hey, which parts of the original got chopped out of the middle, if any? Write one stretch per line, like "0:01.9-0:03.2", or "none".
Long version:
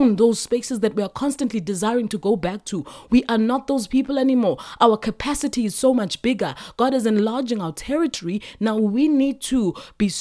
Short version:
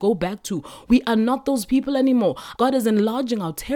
0:04.8-0:06.7

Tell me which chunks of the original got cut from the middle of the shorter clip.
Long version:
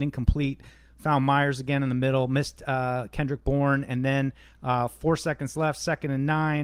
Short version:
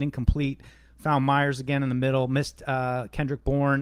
none

